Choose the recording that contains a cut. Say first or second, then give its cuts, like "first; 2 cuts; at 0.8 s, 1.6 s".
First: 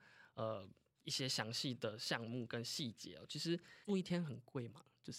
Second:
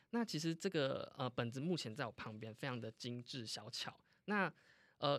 first; 1 cut; at 3.8 s